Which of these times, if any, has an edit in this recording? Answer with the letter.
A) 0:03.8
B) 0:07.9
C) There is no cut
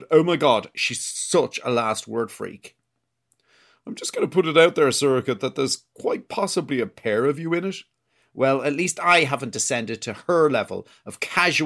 C